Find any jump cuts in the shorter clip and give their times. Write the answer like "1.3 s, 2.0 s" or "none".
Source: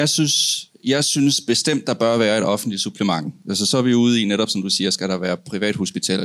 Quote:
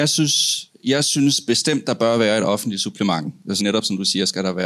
3.6 s